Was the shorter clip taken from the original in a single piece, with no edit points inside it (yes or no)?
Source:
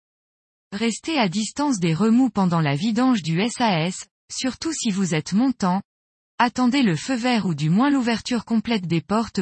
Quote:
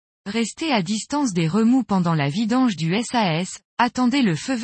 no